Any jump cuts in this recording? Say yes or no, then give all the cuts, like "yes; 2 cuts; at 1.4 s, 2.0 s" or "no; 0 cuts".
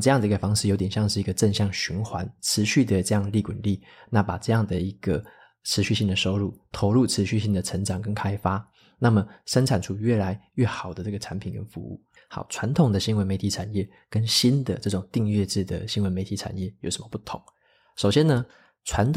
yes; 1 cut; at 12.2 s